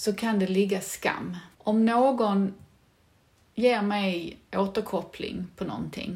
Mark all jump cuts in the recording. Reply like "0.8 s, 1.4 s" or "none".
1.5 s